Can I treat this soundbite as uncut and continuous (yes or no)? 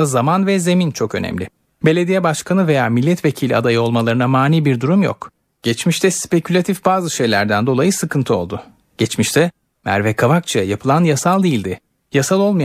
yes